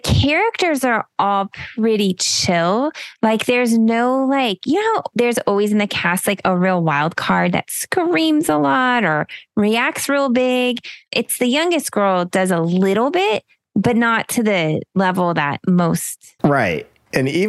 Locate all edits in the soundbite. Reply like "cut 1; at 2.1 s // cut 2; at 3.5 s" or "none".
cut 1; at 16.4 s